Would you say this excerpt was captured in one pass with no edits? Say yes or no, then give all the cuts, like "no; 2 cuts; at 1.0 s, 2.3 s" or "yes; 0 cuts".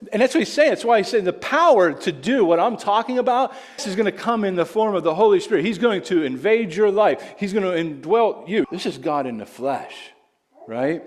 no; 2 cuts; at 3.8 s, 8.6 s